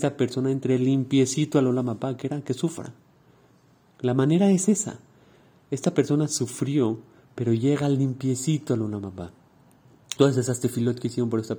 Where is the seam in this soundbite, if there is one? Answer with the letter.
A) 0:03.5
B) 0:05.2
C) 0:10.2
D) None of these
C